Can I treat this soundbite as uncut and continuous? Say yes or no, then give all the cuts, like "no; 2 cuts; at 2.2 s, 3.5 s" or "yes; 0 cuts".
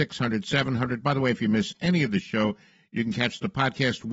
yes; 0 cuts